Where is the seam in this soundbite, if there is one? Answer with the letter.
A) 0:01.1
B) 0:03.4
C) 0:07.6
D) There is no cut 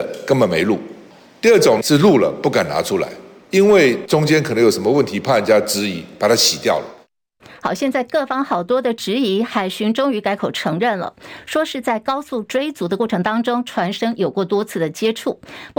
B